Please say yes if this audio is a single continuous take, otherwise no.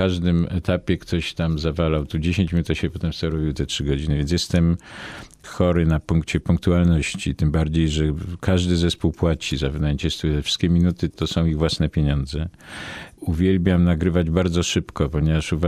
yes